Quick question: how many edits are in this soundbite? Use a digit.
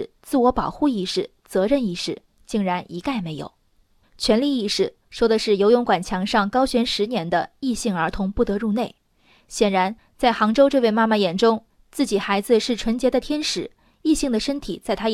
0